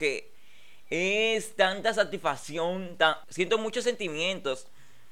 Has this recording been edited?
yes; 1 cut; at 3.2 s

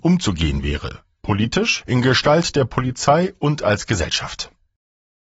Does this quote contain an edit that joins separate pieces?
yes; 1 cut; at 1.8 s

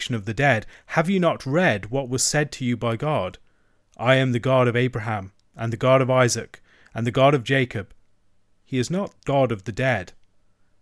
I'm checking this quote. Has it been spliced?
no; 0 cuts

